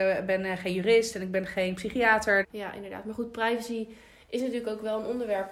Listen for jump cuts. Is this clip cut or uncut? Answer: cut